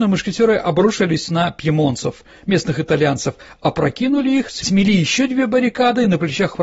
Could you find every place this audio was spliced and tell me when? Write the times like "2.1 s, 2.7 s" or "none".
none